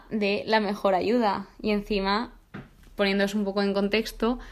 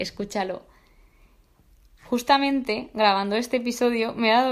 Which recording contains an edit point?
first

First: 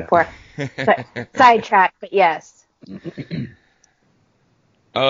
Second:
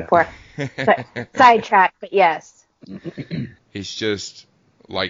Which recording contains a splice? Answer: second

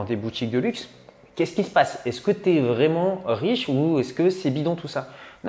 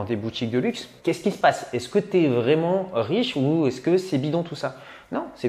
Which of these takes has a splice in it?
second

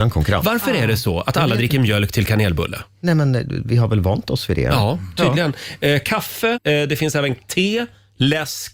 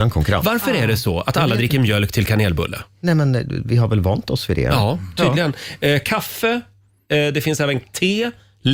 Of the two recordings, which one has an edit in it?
first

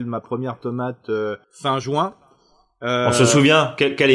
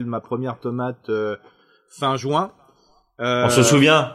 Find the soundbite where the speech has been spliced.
first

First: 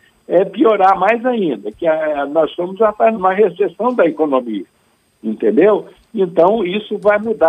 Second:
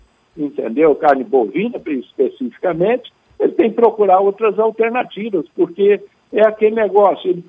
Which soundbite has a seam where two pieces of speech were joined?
first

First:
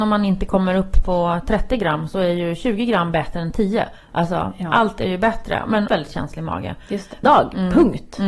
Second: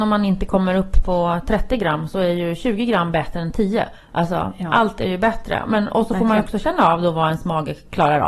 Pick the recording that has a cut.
first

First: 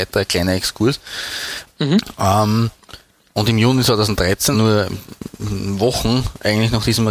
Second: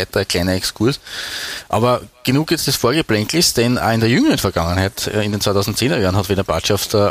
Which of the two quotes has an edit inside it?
first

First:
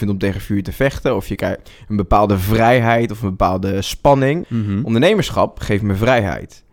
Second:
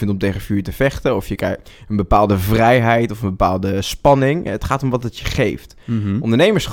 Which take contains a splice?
first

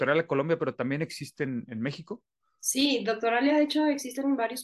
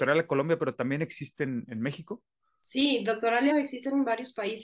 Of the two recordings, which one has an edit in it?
second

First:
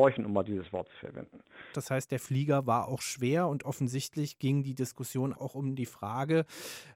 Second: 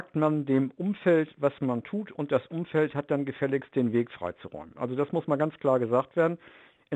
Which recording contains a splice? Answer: first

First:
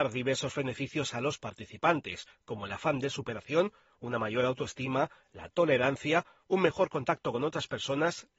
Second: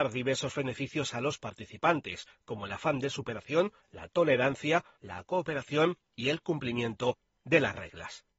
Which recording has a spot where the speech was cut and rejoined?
second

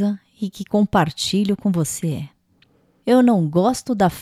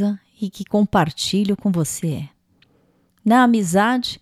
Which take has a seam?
first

